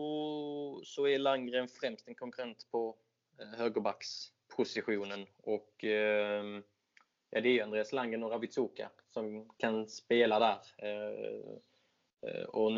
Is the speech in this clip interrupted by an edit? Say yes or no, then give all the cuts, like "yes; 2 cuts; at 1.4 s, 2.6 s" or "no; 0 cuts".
no; 0 cuts